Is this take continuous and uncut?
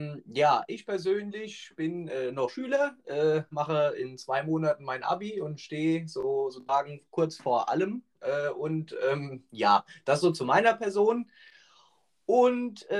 yes; 0 cuts

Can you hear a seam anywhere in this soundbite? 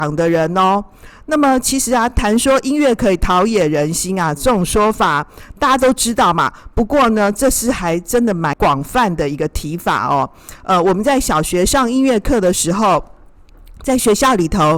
no; 0 cuts

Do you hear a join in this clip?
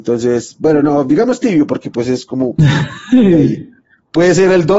no; 0 cuts

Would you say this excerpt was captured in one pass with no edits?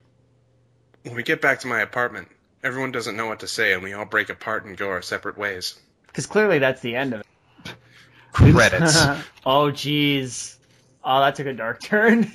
no; 3 cuts; at 6.0 s, 7.2 s, 9.3 s

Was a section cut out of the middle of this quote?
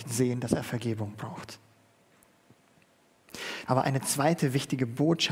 yes; 1 cut; at 3.7 s

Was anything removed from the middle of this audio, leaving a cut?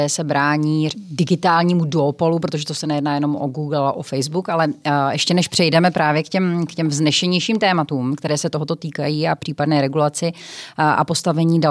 yes; 1 cut; at 0.9 s

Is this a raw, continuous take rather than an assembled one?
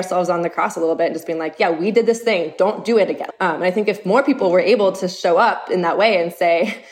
no; 1 cut; at 3.3 s

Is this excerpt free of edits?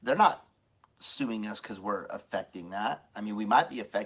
yes; 0 cuts

